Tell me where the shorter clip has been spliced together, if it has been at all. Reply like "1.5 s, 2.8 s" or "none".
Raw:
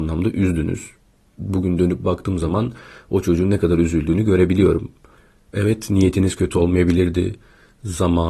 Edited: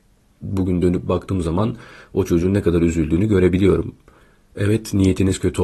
none